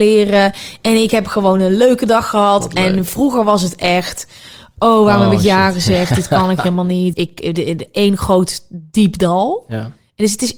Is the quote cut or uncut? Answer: cut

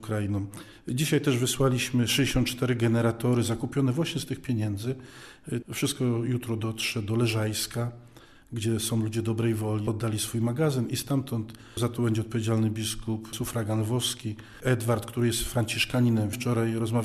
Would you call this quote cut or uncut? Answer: cut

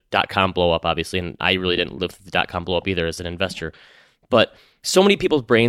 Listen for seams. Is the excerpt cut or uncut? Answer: uncut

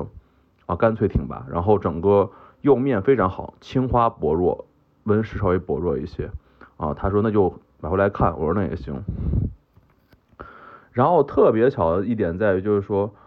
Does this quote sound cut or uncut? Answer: uncut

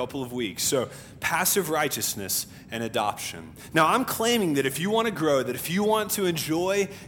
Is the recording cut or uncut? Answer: uncut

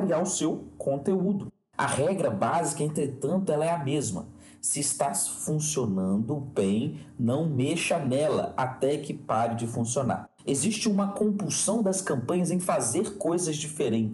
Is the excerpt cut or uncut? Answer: uncut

